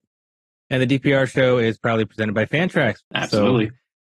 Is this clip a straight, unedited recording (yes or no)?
no